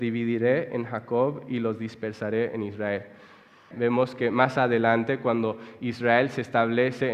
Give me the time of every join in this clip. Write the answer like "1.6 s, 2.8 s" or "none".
3.7 s